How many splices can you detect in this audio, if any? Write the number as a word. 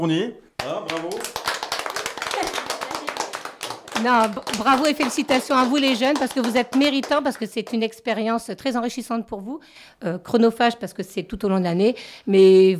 zero